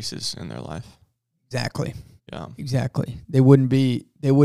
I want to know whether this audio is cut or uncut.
uncut